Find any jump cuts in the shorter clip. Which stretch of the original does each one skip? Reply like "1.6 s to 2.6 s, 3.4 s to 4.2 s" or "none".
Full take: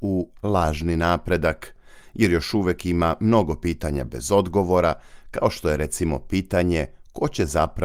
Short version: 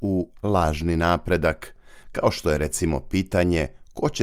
2.0 s to 5.2 s